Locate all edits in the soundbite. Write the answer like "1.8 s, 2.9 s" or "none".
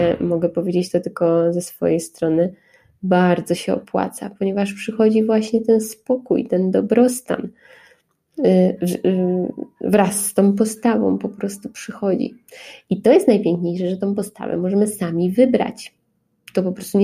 none